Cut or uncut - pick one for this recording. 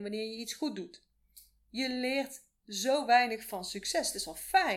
cut